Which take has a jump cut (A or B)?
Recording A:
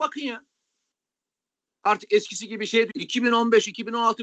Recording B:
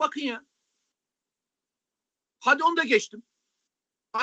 A